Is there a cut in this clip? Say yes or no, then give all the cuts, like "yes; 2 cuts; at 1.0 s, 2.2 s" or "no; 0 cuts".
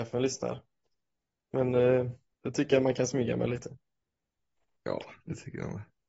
yes; 1 cut; at 2.2 s